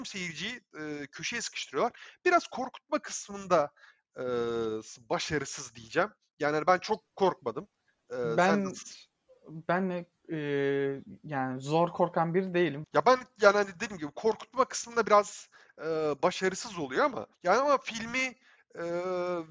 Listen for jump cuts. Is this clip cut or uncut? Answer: cut